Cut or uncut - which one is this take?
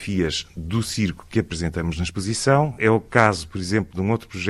uncut